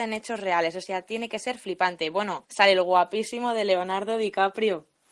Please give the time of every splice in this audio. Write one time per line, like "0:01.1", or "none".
0:02.5